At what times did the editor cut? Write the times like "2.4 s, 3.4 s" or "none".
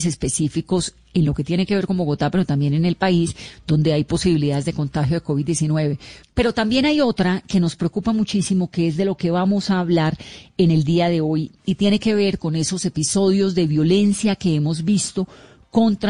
6.2 s